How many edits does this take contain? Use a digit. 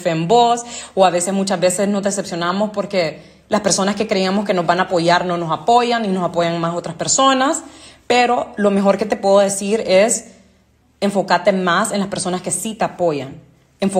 1